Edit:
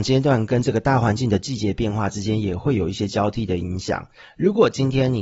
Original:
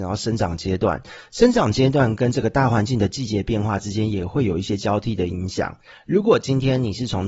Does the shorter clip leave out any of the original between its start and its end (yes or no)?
no